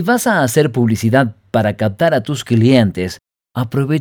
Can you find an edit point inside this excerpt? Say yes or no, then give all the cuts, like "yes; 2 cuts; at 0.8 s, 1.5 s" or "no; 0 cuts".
no; 0 cuts